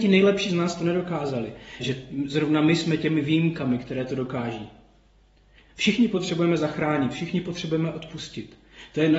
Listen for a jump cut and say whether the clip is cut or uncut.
cut